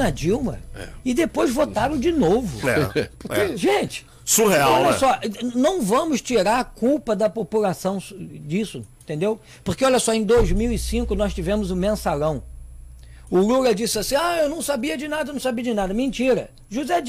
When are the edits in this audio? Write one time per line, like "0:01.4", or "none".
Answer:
none